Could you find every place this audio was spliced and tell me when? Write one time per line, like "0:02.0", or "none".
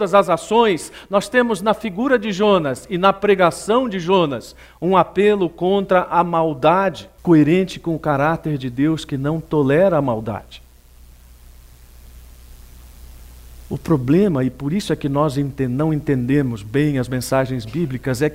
0:07.2